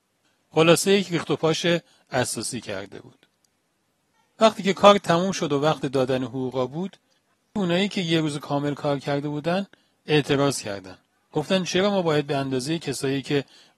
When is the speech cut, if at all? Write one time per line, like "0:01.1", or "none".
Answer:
none